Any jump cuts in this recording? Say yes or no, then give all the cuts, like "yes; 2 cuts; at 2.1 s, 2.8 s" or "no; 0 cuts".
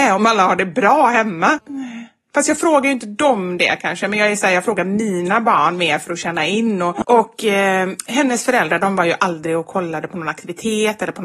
yes; 2 cuts; at 1.6 s, 7.0 s